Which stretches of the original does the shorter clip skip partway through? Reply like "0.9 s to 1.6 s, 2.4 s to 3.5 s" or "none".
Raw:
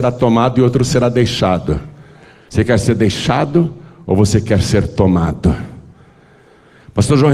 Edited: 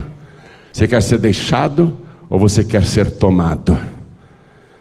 none